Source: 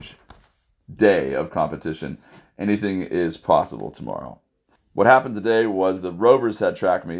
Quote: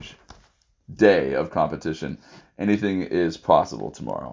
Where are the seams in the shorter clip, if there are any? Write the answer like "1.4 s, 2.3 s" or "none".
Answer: none